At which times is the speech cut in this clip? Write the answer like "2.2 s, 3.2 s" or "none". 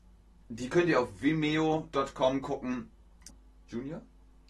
3.3 s